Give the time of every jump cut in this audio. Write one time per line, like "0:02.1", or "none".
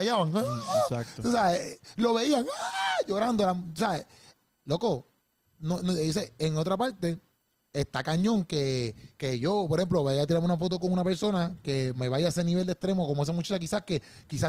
none